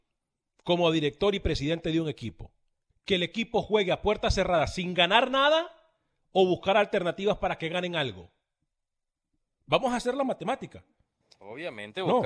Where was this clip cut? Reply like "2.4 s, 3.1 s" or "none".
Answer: 2.9 s